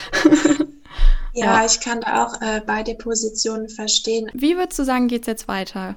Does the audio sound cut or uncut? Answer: cut